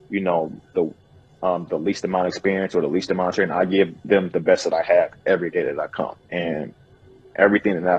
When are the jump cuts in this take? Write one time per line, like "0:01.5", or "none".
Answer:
0:06.2